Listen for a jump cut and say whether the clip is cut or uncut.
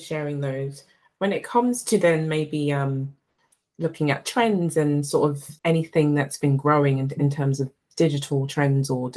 cut